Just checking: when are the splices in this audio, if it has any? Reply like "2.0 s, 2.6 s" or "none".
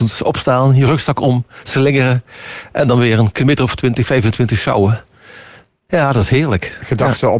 none